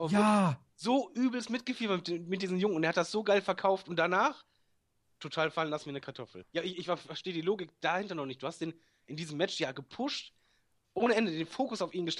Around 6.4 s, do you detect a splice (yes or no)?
yes